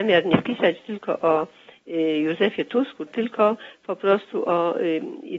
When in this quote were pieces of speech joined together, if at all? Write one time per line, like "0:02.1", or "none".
0:03.1

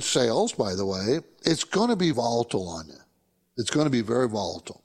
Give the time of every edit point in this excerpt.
0:02.1

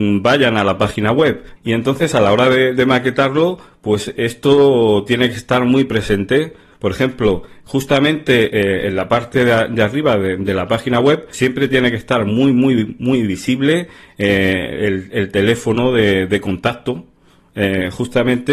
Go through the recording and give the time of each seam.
0:01.6
0:11.3

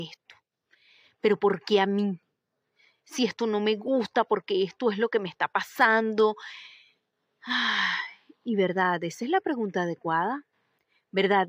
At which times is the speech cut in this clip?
none

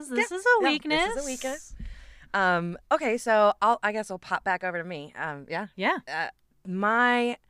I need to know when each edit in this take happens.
0:02.8

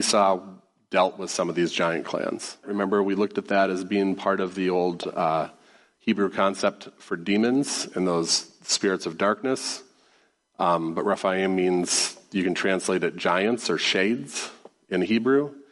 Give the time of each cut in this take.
0:02.6

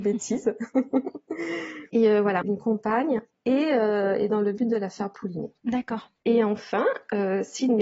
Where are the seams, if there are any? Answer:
0:02.4

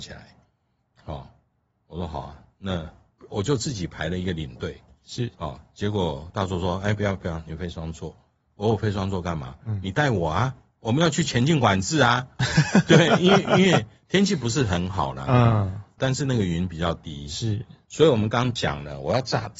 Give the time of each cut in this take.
0:16.0

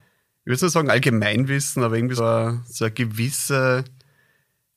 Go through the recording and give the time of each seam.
0:02.2

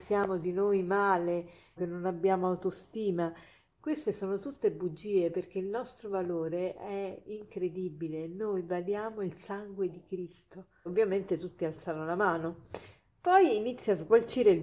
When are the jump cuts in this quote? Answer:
0:01.8
0:10.9

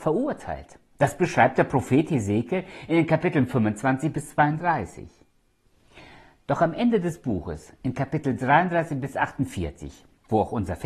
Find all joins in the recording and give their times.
none

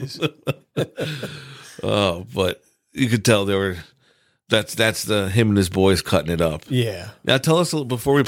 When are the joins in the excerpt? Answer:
none

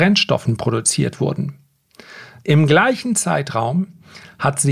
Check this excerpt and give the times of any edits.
0:02.4

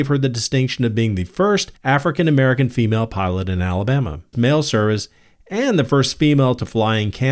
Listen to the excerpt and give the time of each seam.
0:04.3

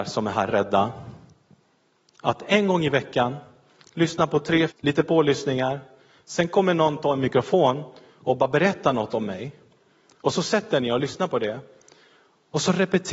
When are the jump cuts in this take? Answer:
0:04.7

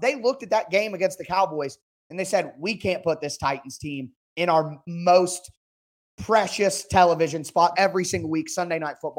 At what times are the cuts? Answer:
0:07.7

